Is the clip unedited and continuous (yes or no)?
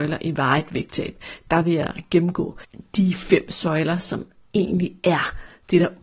yes